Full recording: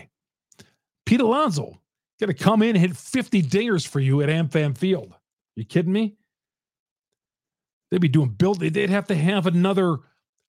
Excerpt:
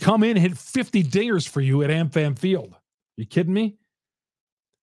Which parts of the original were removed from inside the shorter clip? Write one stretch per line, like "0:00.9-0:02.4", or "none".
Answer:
none